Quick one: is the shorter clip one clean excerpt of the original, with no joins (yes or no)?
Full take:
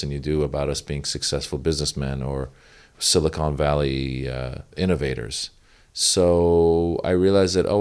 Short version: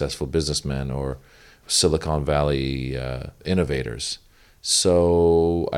yes